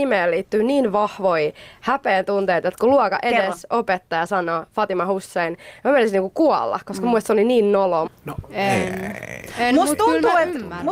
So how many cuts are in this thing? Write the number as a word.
one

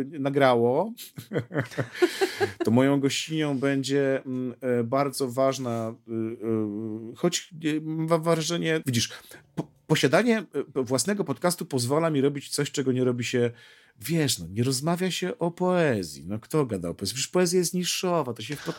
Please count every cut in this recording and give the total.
one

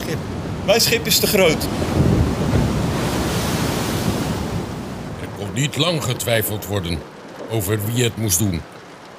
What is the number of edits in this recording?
zero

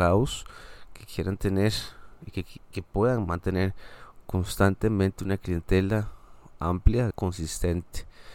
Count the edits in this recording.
one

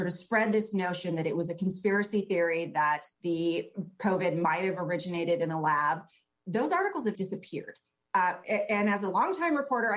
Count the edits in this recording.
two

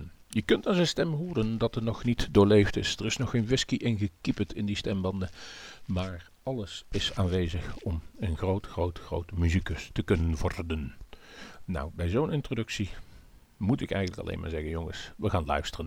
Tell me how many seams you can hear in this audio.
zero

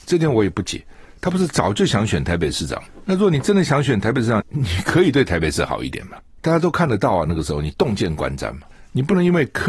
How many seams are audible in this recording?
one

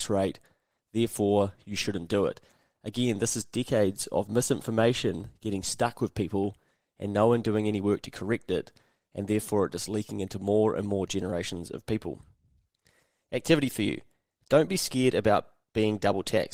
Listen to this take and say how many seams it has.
zero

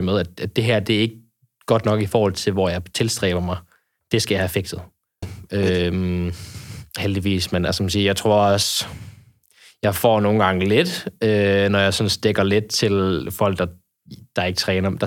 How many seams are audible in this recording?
one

